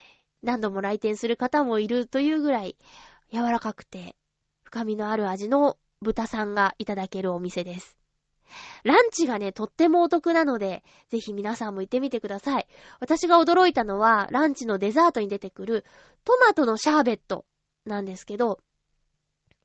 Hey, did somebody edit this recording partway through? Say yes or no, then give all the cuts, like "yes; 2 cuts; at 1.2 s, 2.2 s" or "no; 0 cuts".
no; 0 cuts